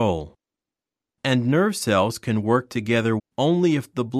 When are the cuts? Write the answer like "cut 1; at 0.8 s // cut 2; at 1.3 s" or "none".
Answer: cut 1; at 3.2 s